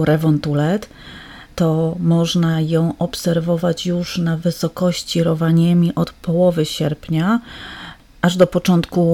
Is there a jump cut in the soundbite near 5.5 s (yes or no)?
no